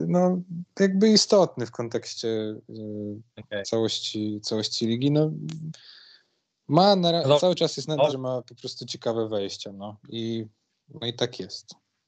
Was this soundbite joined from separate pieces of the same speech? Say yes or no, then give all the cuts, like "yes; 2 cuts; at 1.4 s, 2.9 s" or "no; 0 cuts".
yes; 1 cut; at 8.1 s